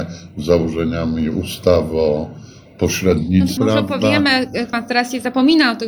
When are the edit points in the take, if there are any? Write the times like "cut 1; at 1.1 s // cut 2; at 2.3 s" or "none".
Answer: cut 1; at 3.6 s // cut 2; at 4.7 s